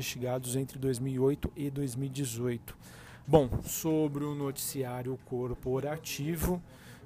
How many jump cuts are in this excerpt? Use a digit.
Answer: 1